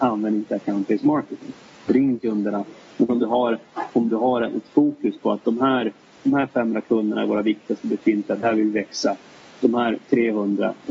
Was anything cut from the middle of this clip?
no; 0 cuts

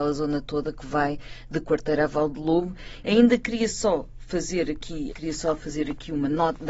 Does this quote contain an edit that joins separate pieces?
yes; 2 cuts; at 3.0 s, 5.1 s

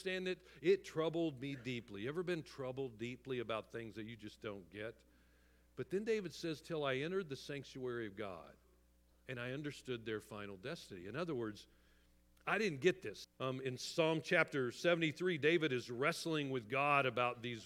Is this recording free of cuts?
no; 1 cut; at 13.2 s

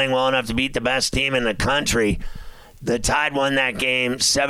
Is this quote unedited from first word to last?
yes; 0 cuts

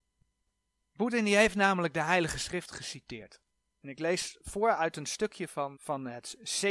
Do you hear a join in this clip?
yes; 1 cut; at 5.7 s

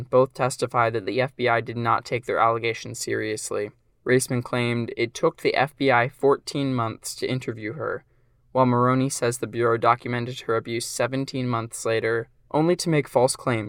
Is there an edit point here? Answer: no; 0 cuts

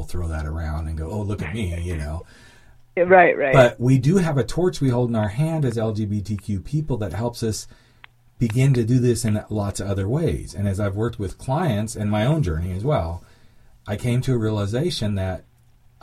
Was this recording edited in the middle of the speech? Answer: no; 0 cuts

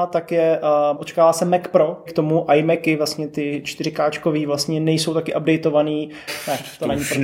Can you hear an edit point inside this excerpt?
yes; 3 cuts; at 1.0 s, 2.1 s, 6.3 s

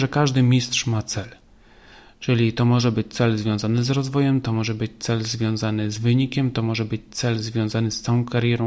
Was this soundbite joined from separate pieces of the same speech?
no; 0 cuts

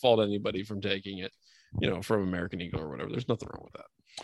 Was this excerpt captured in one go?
yes; 0 cuts

